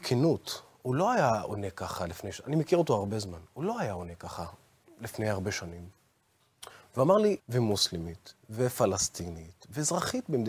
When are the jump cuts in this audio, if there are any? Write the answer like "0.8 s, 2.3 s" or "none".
7.4 s